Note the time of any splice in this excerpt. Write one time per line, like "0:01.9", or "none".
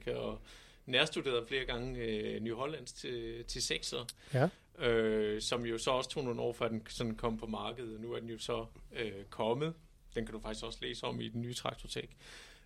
none